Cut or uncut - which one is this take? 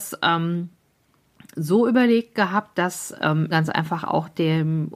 cut